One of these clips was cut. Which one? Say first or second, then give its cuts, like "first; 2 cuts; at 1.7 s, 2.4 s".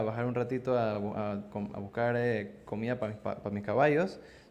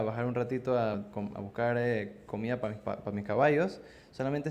second; 1 cut; at 0.9 s